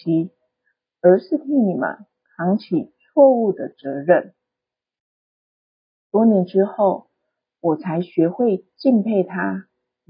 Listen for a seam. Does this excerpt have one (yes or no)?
no